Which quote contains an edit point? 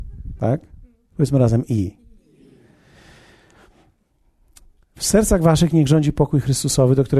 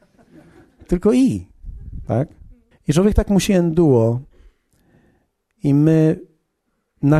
second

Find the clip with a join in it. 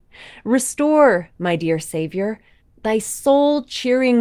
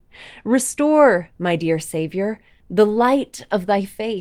first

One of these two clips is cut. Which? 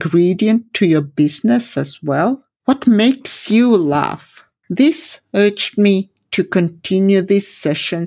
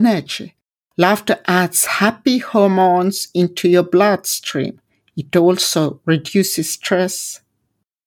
first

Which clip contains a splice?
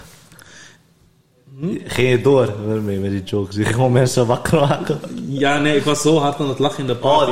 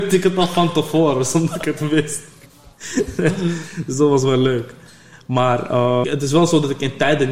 second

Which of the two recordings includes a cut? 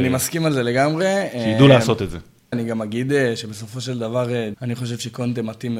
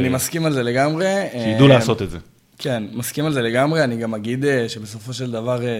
first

